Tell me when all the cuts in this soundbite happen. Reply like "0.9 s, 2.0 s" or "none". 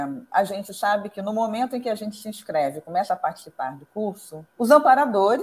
4.5 s